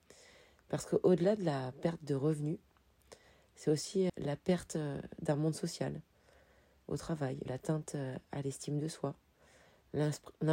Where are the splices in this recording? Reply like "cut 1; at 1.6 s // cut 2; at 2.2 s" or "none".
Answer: cut 1; at 4.1 s // cut 2; at 7.5 s